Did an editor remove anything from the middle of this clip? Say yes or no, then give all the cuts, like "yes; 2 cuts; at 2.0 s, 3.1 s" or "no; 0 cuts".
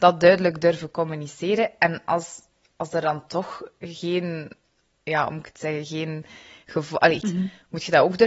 yes; 1 cut; at 7.2 s